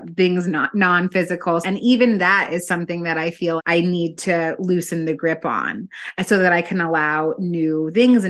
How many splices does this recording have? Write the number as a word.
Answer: two